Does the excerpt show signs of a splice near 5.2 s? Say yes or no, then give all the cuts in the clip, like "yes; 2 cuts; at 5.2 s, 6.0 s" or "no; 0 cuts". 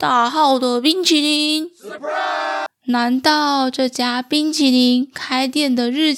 no; 1 cut; at 2.7 s